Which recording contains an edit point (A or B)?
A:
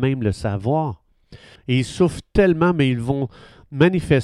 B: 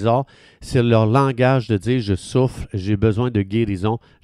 A